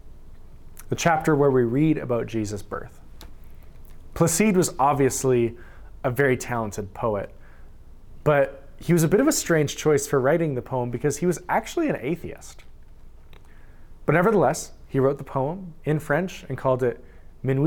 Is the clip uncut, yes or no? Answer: yes